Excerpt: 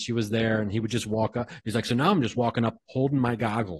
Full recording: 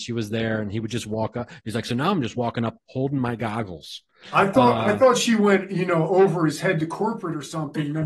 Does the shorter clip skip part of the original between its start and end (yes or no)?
no